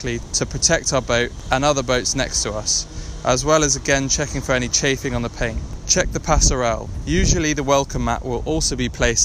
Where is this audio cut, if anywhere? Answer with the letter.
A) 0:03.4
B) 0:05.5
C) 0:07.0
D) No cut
C